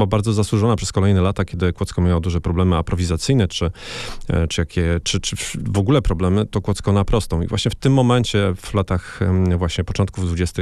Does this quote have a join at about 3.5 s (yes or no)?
no